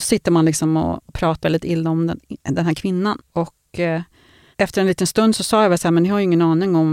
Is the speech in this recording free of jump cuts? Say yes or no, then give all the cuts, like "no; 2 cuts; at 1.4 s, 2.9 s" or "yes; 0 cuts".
no; 1 cut; at 1.4 s